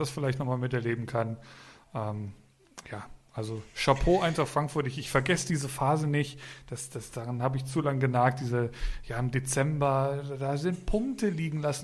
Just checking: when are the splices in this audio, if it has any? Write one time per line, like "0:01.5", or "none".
none